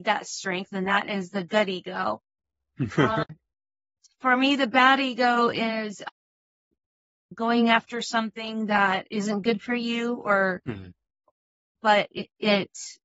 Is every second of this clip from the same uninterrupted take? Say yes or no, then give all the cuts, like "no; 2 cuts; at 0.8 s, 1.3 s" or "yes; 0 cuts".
yes; 0 cuts